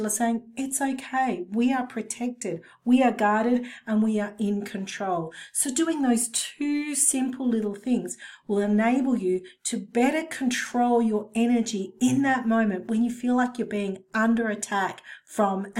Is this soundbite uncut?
yes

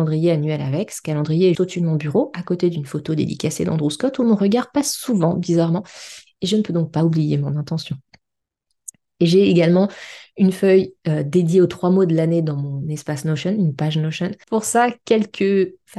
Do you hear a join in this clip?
yes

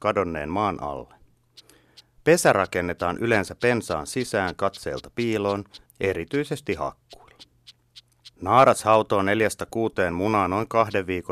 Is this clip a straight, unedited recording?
no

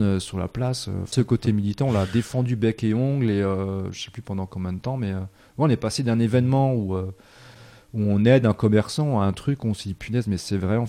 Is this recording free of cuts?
yes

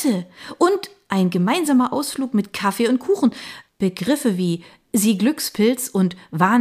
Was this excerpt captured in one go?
no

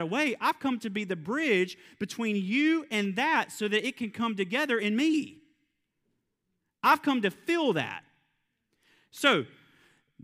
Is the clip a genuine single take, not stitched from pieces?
yes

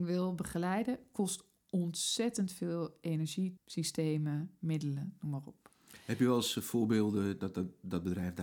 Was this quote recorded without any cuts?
no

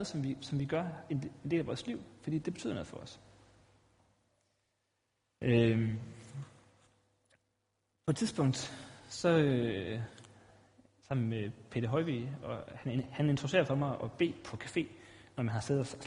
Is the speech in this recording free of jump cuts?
yes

